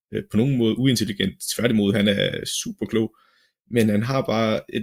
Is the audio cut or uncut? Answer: uncut